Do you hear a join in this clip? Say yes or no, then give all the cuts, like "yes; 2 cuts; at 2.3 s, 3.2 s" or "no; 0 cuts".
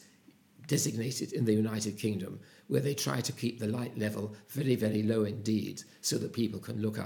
no; 0 cuts